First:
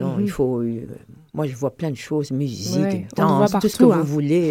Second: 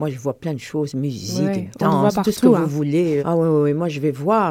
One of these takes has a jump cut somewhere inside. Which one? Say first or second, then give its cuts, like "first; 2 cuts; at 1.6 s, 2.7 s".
second; 1 cut; at 3.2 s